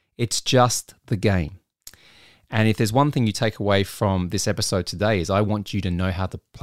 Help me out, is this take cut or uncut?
uncut